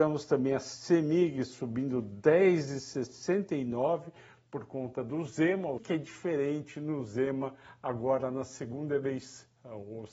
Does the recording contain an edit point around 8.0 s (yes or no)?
no